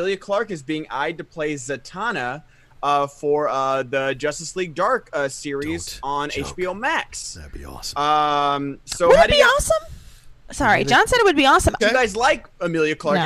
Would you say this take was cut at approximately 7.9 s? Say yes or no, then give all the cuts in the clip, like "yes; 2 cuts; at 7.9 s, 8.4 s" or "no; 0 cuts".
no; 2 cuts; at 10.4 s, 11.8 s